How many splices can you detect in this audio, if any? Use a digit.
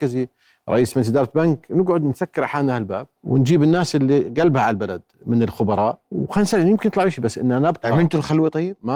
2